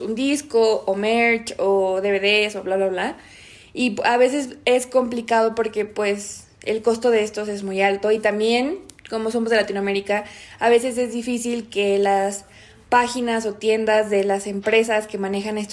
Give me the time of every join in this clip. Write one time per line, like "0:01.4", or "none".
none